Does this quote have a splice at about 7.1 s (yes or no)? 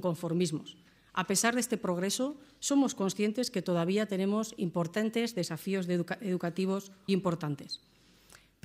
yes